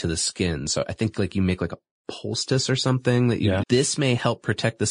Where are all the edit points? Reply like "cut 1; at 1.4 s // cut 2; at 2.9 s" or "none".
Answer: cut 1; at 3.6 s